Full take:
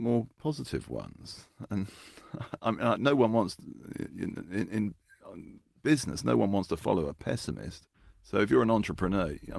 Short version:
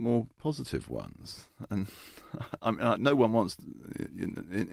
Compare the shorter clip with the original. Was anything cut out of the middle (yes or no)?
no